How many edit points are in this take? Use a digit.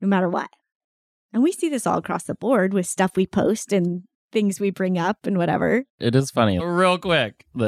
1